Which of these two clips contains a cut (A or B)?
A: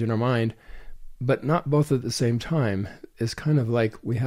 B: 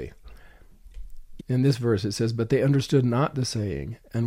B